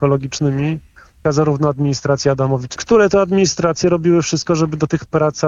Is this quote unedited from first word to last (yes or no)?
no